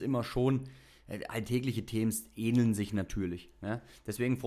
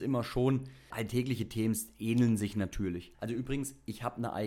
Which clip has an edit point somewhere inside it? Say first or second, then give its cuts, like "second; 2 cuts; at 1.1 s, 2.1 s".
second; 2 cuts; at 0.9 s, 3.1 s